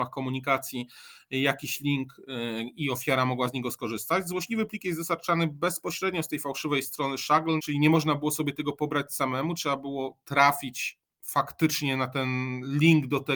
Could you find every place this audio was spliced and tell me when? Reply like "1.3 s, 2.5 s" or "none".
7.6 s